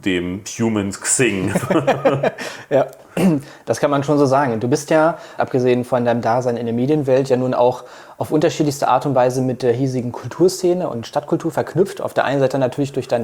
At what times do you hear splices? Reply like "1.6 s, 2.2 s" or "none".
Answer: 5.4 s

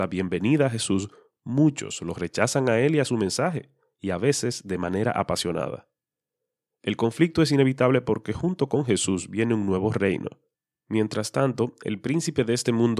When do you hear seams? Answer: none

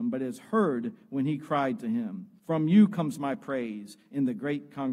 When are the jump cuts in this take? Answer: 2.4 s

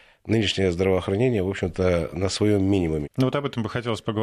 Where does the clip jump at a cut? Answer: 3.0 s

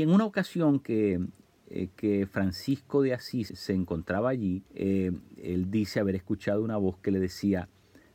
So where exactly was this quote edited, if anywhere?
3.5 s, 4.7 s

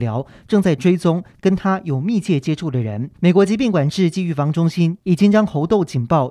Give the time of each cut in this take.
3.2 s

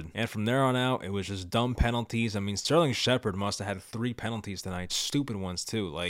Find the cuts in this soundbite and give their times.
4.9 s

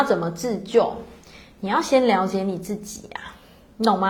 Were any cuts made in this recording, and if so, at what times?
none

